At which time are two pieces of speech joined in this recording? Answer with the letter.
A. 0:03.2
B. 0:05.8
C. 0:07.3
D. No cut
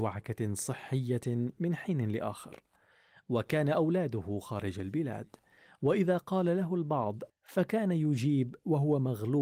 C